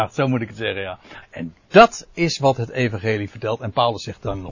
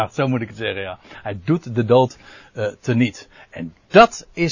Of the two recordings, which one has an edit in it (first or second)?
first